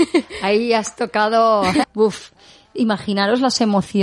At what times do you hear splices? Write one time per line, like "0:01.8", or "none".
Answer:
0:01.8